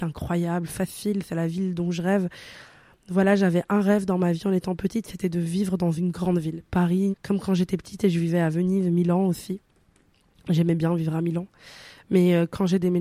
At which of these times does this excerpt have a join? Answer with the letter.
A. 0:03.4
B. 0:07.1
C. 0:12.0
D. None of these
B